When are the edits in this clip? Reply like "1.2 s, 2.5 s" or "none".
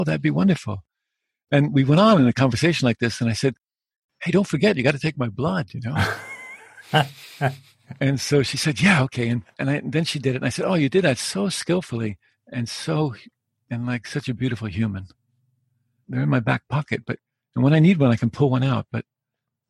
9.5 s, 16.0 s